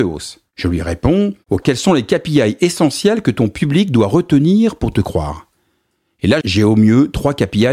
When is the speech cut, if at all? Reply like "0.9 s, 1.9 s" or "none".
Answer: 1.6 s, 6.4 s